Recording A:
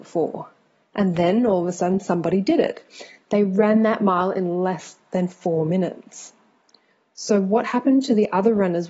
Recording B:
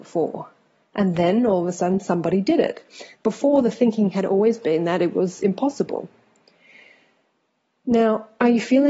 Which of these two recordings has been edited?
B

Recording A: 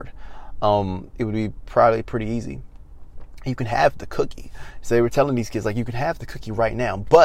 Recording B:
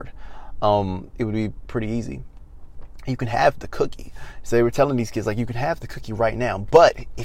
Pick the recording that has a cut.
B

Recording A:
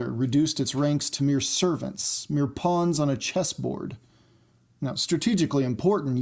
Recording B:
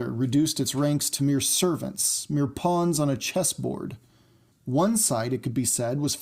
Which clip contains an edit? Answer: B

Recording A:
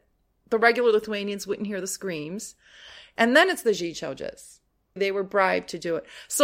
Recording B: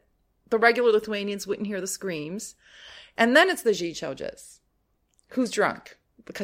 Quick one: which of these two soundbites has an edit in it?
A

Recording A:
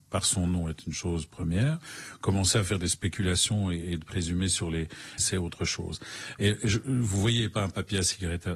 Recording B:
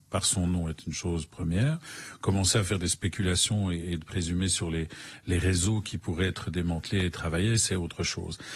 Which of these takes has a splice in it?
A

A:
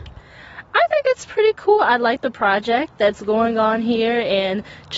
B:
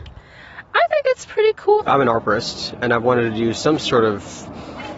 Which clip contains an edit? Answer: B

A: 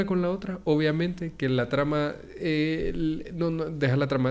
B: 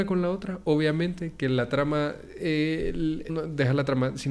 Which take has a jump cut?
B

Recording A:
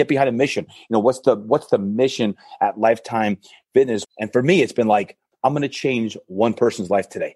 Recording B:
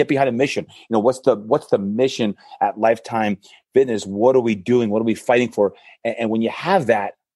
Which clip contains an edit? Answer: A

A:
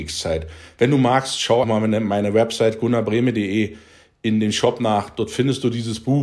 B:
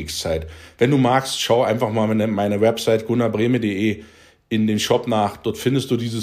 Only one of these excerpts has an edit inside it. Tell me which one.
A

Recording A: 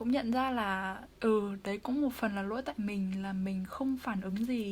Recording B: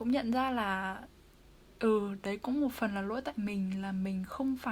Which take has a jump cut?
A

